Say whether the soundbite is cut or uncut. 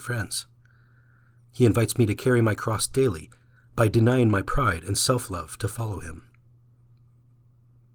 cut